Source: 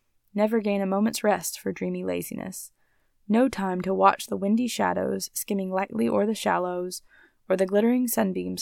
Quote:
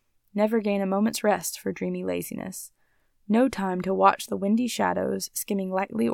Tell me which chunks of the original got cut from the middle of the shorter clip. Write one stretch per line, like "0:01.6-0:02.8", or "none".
none